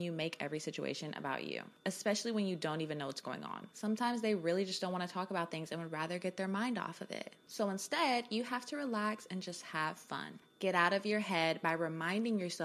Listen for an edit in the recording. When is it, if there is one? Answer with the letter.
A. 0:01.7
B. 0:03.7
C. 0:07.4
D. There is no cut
D